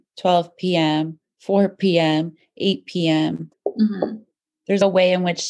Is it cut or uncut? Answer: cut